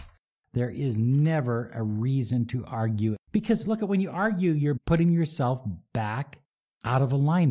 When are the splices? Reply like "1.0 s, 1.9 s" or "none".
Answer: 3.2 s, 4.8 s